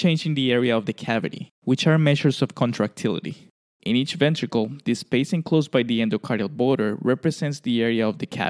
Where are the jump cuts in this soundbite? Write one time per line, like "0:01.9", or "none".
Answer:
0:03.7